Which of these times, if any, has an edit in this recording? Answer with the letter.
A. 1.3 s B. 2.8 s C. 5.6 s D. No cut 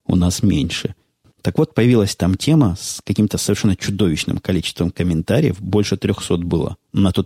A